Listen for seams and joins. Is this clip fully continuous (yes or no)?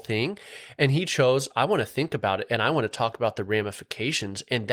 yes